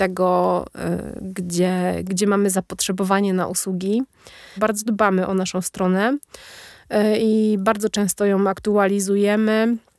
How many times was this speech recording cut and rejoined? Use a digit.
1